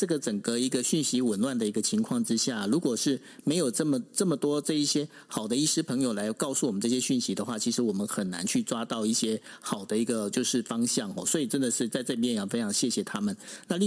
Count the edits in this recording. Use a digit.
0